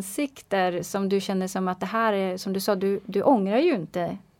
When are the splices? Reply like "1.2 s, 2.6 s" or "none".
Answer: none